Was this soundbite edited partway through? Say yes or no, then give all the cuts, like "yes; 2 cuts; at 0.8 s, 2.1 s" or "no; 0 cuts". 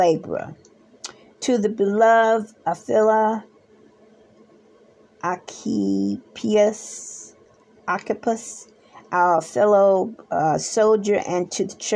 no; 0 cuts